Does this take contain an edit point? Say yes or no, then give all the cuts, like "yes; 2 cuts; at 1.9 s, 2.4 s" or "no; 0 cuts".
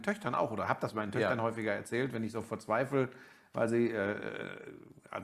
no; 0 cuts